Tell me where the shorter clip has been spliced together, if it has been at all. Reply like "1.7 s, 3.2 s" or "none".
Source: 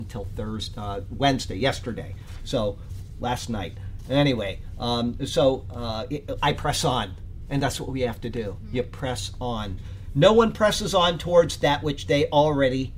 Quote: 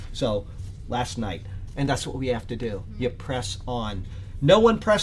1.7 s